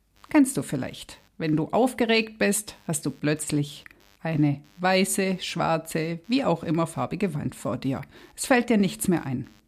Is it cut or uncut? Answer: uncut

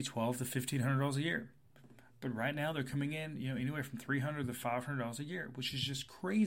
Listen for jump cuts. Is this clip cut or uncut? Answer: uncut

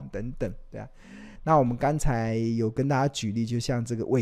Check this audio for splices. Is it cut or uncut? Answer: cut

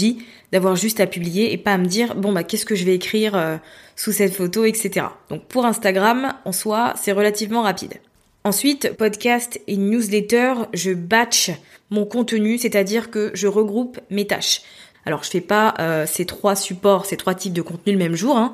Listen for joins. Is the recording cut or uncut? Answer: cut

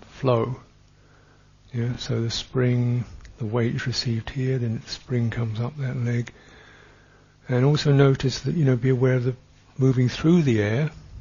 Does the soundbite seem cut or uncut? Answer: uncut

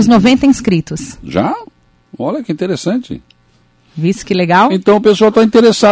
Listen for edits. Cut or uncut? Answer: uncut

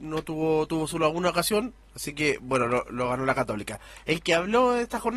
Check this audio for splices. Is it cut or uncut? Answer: uncut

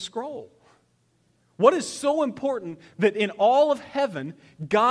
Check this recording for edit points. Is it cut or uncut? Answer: uncut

